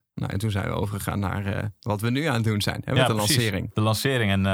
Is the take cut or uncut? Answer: uncut